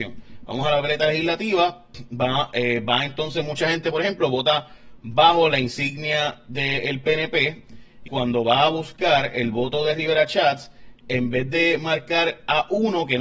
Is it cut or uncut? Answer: cut